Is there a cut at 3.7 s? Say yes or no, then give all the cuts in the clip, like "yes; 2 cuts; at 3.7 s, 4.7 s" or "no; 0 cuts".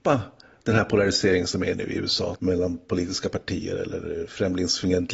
no; 1 cut; at 2.4 s